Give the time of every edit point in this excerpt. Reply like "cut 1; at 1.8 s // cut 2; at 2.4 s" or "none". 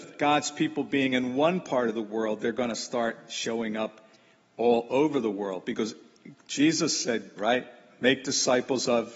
cut 1; at 7.4 s